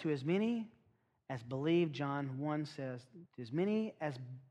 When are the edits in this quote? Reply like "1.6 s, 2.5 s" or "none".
3.3 s